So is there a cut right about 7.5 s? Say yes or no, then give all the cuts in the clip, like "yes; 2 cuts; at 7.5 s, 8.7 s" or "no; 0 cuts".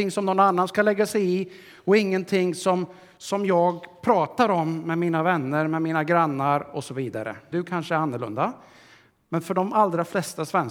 yes; 1 cut; at 7.5 s